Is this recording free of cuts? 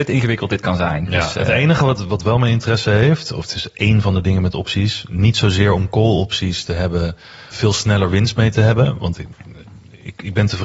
no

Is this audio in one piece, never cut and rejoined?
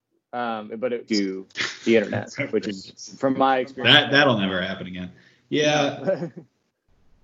no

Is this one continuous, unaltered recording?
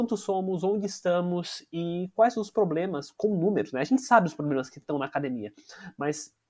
yes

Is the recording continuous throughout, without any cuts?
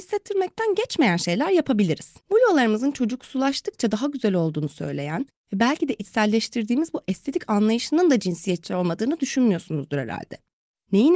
no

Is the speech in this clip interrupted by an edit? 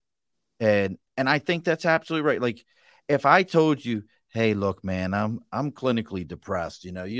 no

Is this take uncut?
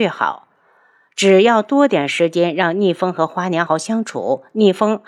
no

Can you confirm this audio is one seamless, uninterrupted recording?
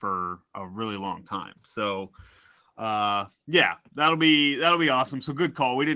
yes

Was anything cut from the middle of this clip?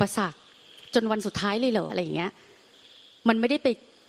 yes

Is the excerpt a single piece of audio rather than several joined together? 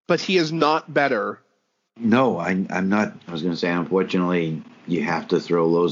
no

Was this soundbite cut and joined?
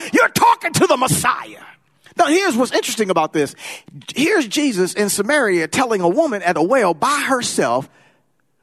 no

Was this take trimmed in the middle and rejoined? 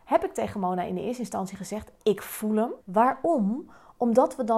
yes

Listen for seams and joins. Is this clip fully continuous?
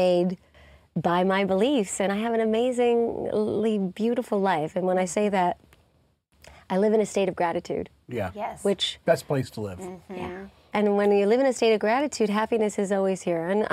yes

